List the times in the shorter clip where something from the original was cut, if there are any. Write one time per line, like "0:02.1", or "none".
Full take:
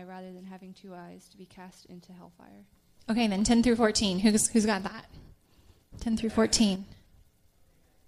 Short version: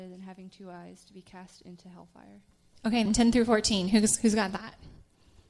0:03.1